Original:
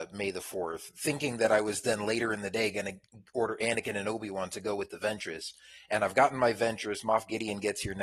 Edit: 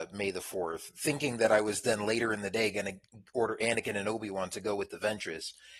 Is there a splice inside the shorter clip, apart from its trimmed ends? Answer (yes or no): no